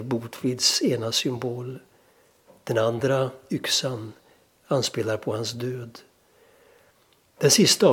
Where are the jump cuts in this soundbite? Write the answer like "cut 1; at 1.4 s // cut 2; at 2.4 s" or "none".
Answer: none